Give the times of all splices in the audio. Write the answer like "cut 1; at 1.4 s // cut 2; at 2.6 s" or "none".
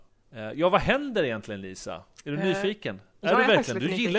none